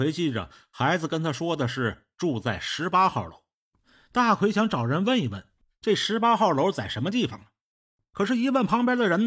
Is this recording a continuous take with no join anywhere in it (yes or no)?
yes